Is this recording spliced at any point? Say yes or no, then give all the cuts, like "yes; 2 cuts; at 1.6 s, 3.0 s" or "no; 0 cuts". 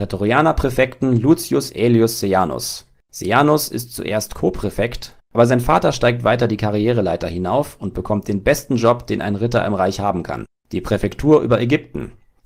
yes; 1 cut; at 5.2 s